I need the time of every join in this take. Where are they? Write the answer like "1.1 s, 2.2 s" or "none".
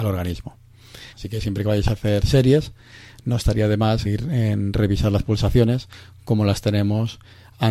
1.1 s, 4.1 s